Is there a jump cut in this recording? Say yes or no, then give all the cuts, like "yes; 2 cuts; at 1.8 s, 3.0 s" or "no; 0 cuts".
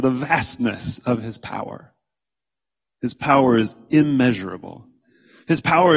no; 0 cuts